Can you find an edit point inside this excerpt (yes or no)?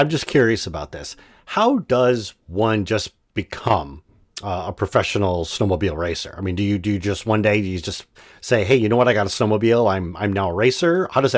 no